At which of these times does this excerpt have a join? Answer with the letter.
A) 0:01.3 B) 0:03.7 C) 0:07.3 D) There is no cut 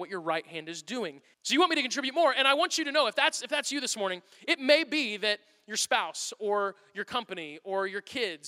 A